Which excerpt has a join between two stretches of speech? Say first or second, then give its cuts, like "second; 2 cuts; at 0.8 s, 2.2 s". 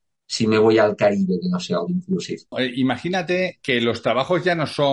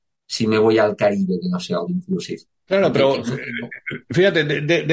first; 1 cut; at 2.5 s